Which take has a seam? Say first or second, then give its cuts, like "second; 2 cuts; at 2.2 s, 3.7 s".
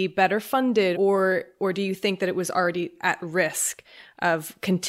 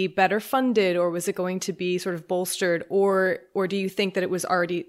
first; 1 cut; at 0.9 s